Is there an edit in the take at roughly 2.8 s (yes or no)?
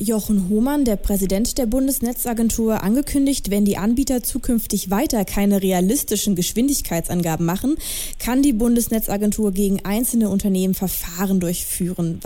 no